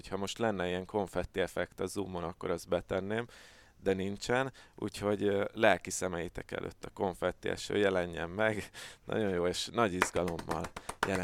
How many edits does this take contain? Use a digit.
0